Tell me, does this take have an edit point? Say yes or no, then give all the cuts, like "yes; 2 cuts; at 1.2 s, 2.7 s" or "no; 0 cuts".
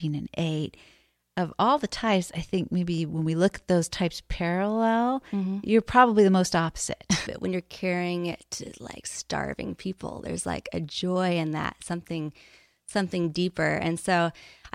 yes; 1 cut; at 7.3 s